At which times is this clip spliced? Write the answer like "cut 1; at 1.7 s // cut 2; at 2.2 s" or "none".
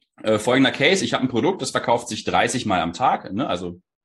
none